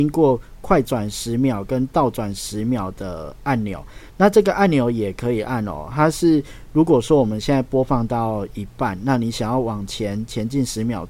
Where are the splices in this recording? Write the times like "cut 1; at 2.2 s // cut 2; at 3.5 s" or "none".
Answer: none

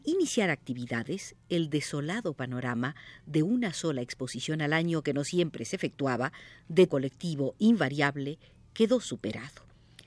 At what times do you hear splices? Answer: cut 1; at 6.9 s

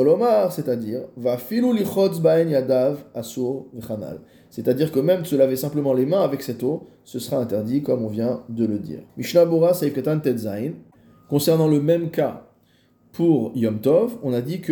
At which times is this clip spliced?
cut 1; at 9.1 s

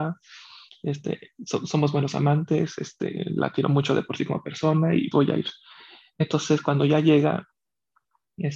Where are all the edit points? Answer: cut 1; at 5.1 s

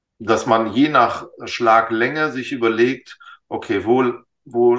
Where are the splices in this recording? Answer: none

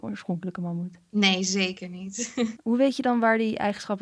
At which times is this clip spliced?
cut 1; at 2.6 s

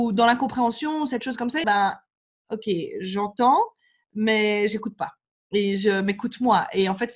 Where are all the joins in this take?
cut 1; at 1.6 s

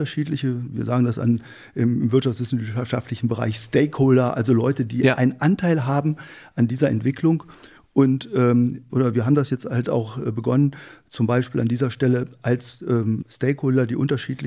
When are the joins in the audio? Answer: cut 1; at 8.9 s // cut 2; at 13.2 s

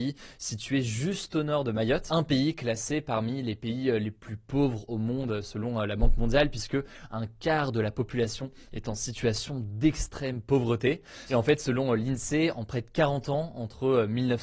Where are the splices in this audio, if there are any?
cut 1; at 11.3 s

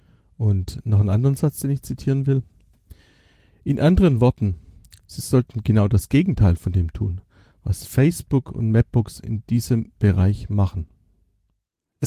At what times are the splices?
none

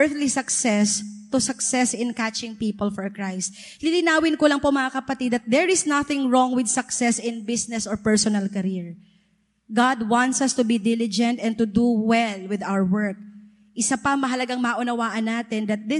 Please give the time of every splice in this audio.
none

